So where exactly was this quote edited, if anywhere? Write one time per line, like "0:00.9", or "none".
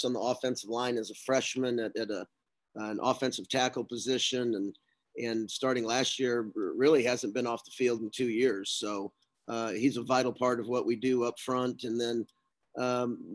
none